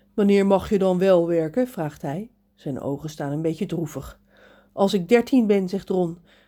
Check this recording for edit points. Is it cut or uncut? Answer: uncut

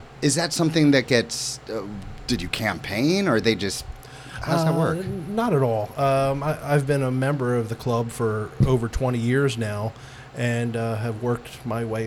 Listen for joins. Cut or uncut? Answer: uncut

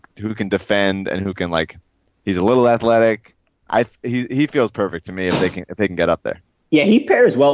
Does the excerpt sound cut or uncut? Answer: uncut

